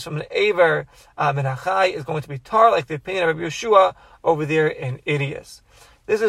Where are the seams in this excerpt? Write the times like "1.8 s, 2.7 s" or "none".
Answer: none